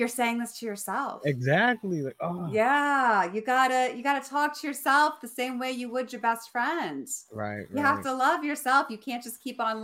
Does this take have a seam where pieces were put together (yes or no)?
no